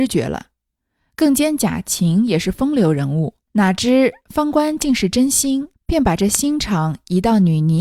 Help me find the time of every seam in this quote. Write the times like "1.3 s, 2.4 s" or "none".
3.5 s, 5.7 s